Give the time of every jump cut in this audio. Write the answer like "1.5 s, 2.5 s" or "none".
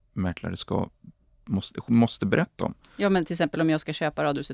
none